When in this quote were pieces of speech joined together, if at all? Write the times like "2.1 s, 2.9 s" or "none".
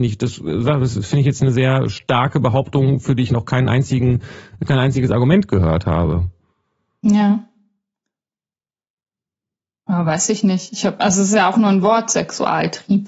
none